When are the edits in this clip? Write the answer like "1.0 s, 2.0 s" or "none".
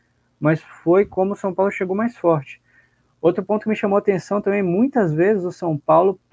none